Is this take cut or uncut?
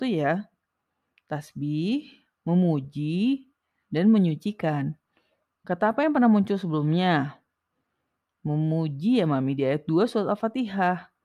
uncut